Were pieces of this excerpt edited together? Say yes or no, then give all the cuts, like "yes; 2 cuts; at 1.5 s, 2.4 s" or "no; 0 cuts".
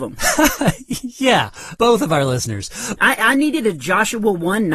yes; 2 cuts; at 1.8 s, 3.0 s